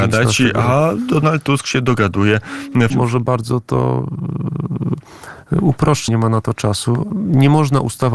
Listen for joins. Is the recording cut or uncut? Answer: cut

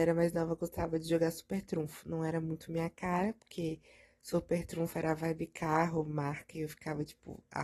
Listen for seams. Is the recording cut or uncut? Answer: uncut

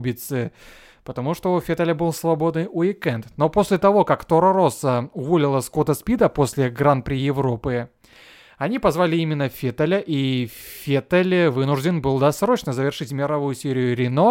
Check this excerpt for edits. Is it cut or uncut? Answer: uncut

